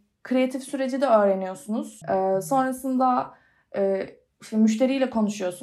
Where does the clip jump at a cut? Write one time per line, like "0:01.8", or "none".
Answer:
0:02.0